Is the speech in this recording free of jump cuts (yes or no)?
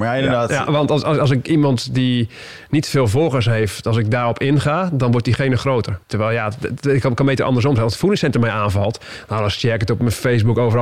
no